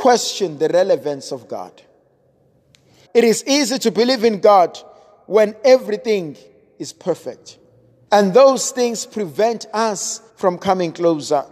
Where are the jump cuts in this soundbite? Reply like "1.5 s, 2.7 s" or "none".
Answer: 3.0 s, 8.1 s, 10.3 s